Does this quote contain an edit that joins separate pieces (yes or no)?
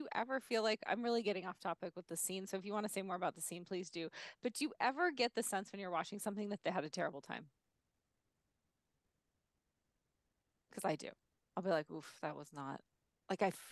no